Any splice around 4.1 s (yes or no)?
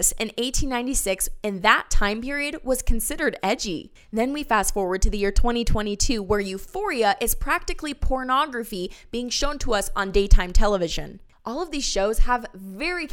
no